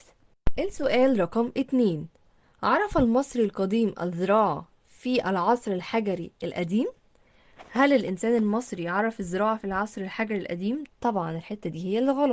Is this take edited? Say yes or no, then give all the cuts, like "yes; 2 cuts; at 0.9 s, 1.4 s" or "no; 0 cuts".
yes; 1 cut; at 10.9 s